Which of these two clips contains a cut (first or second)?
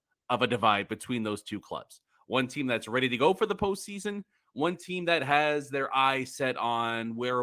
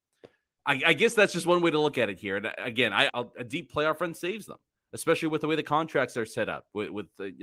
second